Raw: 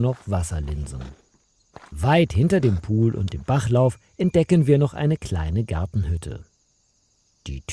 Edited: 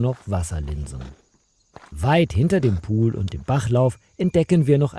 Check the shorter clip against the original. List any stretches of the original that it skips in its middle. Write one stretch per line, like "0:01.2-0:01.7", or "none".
none